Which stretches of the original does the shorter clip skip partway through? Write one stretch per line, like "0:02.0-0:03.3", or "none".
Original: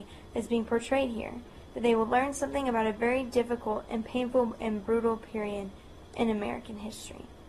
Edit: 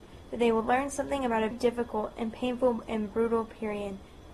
0:02.9-0:03.2